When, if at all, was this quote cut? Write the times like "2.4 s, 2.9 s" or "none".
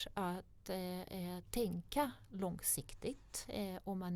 none